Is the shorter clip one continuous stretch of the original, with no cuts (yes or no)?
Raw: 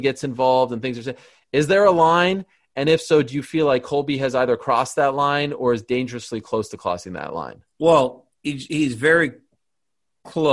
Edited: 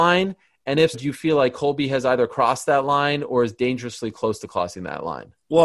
no